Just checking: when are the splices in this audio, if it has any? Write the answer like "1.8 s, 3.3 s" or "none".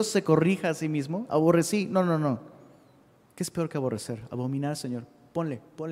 none